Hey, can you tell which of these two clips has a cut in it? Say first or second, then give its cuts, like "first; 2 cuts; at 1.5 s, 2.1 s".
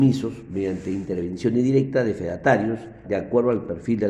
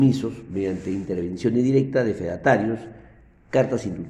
first; 1 cut; at 3.0 s